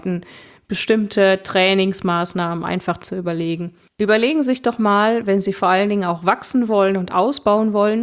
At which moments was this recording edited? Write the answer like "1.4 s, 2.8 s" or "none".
none